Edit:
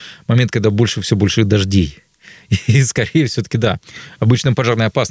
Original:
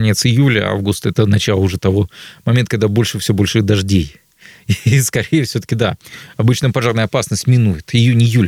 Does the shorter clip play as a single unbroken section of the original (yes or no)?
yes